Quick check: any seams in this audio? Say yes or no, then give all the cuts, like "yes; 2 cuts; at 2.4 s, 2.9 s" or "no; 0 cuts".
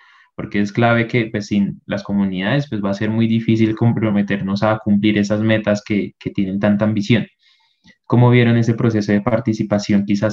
no; 0 cuts